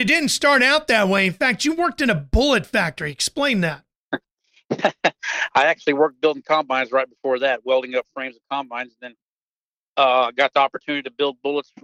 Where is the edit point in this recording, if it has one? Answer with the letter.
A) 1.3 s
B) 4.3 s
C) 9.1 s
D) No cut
D